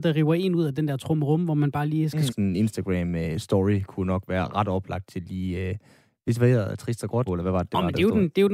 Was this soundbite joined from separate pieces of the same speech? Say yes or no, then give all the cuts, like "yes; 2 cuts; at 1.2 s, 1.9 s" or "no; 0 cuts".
yes; 2 cuts; at 2.3 s, 7.3 s